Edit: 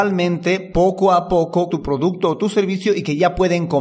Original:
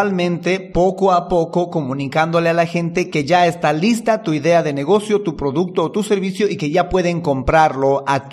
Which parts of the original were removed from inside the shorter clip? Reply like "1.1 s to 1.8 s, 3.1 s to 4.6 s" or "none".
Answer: 1.7 s to 5.2 s